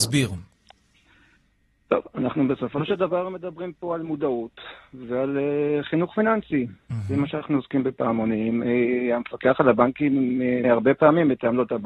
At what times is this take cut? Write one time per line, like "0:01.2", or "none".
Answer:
0:10.6